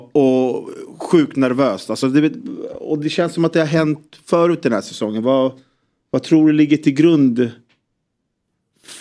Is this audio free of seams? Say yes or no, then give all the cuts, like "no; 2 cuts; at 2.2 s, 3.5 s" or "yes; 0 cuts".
yes; 0 cuts